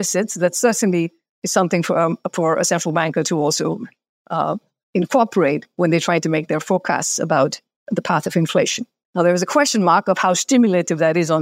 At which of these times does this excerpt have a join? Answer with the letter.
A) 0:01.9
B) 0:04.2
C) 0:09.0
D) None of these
C